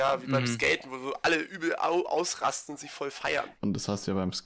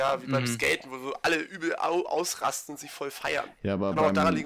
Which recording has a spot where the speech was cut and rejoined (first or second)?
first